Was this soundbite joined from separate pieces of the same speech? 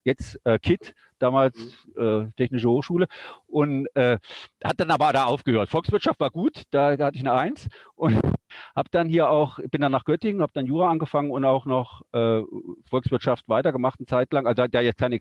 no; 0 cuts

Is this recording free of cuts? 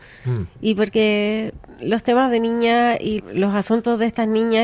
no; 1 cut; at 3.2 s

